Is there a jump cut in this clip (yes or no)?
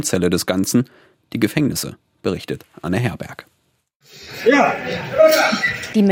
no